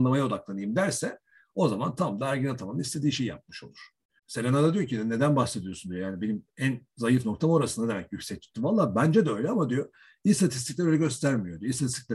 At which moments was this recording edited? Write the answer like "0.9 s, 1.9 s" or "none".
4.2 s